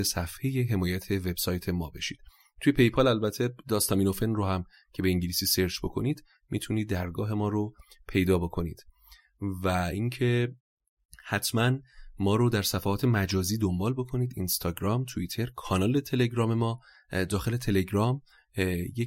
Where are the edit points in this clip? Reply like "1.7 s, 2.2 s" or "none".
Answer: none